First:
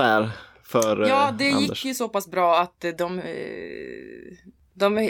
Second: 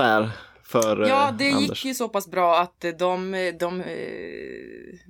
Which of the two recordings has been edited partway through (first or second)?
first